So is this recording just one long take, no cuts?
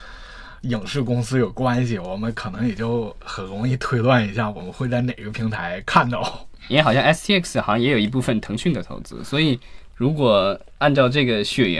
yes; 0 cuts

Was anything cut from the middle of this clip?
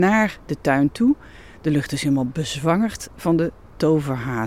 no; 0 cuts

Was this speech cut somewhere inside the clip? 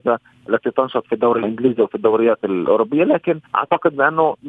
yes; 1 cut; at 3.5 s

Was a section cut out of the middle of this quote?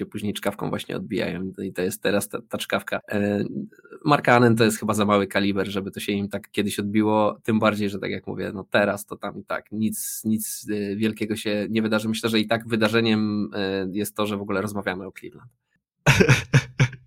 no; 0 cuts

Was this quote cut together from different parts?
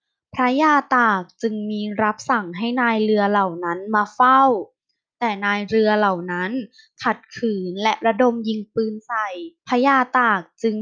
yes; 1 cut; at 9.6 s

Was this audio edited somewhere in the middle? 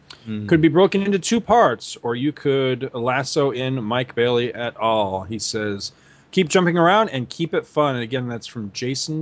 no; 0 cuts

